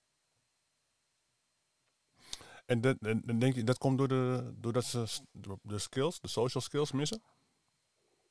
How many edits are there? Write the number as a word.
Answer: zero